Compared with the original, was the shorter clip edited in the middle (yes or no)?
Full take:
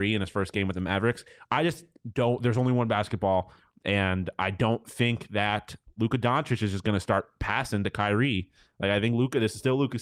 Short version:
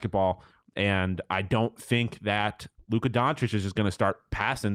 no